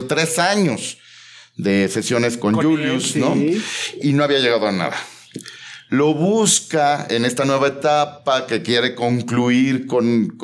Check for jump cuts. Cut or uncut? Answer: cut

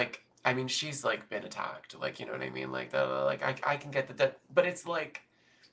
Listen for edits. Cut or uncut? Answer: uncut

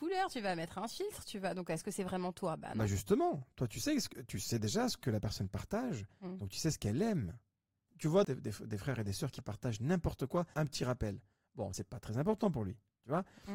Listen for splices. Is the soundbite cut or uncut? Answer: cut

